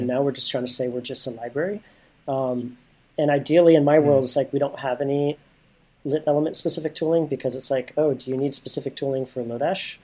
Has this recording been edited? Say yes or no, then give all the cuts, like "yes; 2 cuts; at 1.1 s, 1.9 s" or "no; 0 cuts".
no; 0 cuts